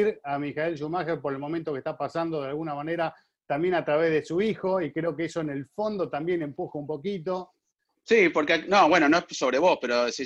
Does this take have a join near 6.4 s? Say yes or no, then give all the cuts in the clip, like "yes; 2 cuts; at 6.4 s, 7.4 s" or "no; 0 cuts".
no; 1 cut; at 7.9 s